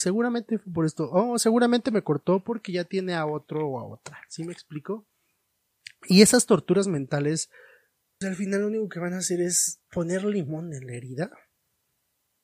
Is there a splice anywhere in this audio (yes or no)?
yes